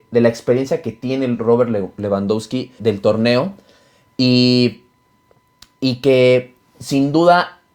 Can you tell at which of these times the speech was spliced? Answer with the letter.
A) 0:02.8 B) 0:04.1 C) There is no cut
A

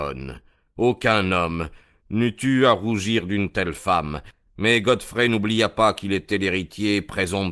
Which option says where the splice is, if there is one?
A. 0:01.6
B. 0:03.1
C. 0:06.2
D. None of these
D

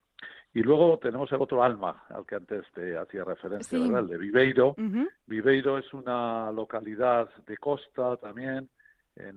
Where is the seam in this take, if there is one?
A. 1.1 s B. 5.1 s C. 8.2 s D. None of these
B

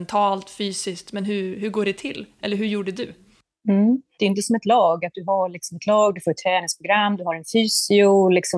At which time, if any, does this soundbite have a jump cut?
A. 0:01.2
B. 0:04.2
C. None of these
B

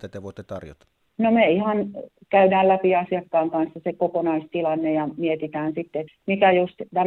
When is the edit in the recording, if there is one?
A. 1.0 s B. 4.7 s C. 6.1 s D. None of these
C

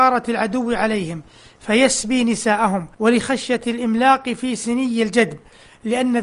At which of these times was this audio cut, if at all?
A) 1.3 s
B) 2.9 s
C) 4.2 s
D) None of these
B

